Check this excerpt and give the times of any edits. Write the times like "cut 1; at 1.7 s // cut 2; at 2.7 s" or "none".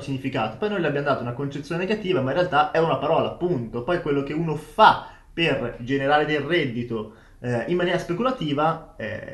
none